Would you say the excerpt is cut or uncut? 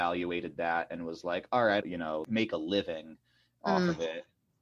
cut